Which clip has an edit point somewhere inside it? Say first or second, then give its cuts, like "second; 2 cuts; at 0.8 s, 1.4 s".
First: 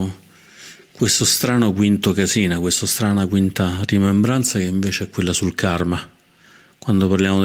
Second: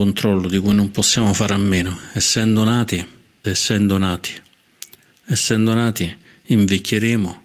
second; 1 cut; at 3.4 s